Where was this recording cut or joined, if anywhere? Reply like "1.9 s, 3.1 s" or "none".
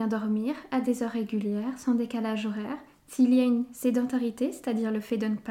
none